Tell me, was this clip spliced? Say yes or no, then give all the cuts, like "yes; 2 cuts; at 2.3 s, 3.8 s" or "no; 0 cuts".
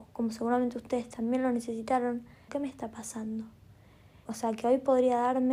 yes; 2 cuts; at 2.5 s, 4.3 s